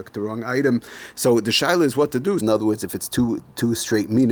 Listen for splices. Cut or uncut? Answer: cut